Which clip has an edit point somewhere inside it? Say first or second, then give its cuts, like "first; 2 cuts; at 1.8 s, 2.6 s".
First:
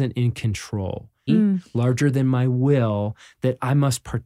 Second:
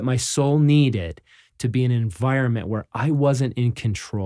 first; 1 cut; at 1.3 s